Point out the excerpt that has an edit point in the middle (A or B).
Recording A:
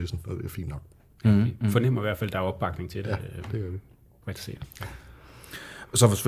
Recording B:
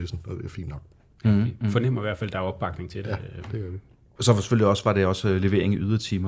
B